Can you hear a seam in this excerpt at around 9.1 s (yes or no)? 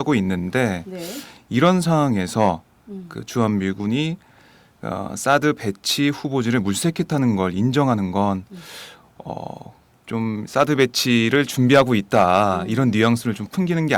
no